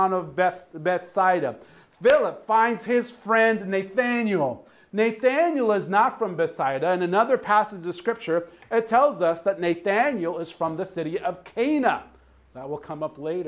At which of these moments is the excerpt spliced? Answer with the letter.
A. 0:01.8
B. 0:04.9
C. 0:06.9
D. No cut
D